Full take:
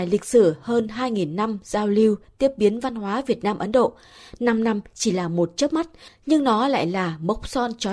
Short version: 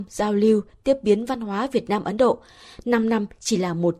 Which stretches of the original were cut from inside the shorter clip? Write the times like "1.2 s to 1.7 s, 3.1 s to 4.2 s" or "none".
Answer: none